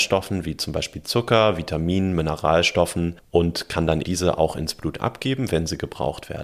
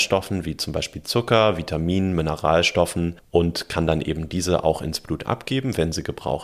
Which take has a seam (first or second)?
first